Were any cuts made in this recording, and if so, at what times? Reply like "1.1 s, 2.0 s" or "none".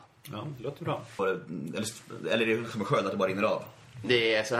1.2 s